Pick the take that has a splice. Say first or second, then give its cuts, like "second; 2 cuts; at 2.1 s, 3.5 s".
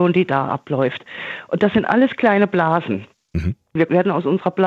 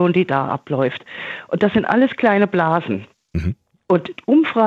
first; 1 cut; at 3.8 s